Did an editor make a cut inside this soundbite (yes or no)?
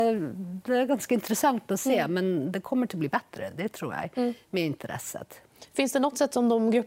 no